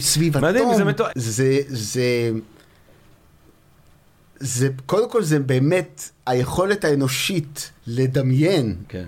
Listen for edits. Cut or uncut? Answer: cut